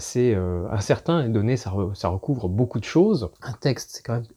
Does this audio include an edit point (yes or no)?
yes